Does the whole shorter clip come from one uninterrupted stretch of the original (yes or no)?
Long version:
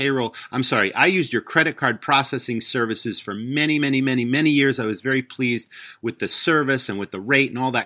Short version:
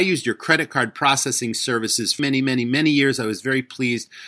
no